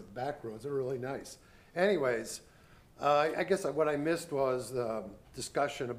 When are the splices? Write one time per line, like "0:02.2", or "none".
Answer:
none